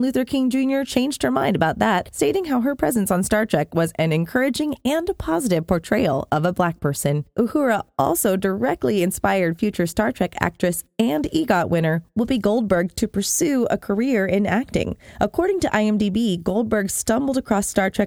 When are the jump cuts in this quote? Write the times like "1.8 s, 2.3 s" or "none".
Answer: none

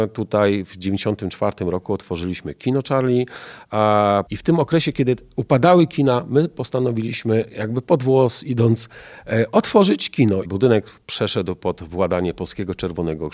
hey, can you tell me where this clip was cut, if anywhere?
4.3 s, 10.4 s

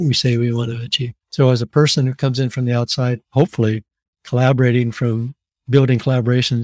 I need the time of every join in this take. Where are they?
1.2 s, 3.2 s

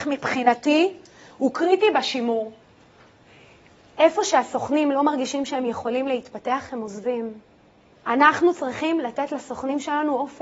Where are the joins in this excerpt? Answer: 7.9 s

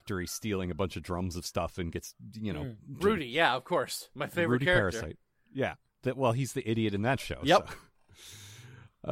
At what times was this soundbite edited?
3.0 s

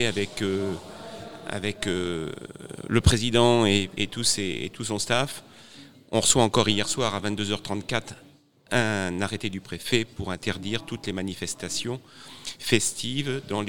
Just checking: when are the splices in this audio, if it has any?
4.0 s

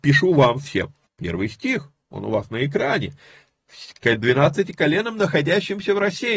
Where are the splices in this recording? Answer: 1.1 s

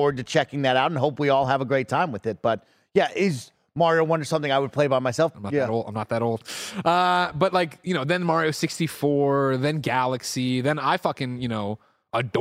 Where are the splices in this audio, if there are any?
5.3 s

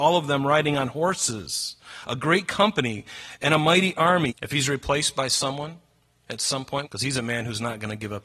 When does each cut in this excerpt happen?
4.3 s, 6.8 s

